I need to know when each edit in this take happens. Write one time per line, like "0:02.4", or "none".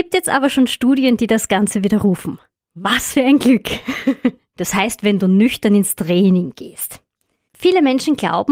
0:04.5